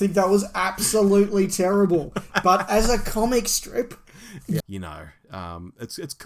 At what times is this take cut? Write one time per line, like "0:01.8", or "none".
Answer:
0:04.6

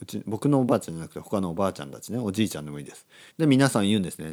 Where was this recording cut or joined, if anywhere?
0:03.3

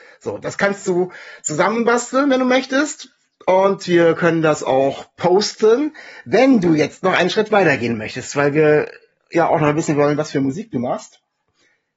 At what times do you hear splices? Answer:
none

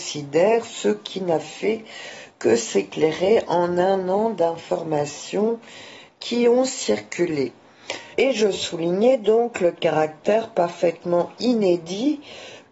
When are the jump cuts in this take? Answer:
0:08.1

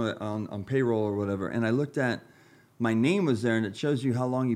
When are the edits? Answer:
none

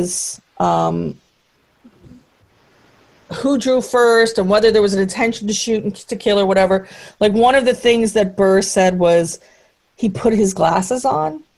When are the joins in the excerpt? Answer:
none

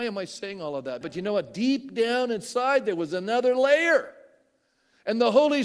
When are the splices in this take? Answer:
0:01.0

